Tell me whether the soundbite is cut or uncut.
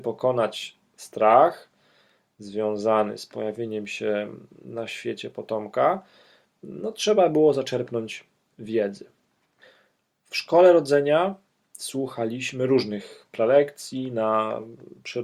uncut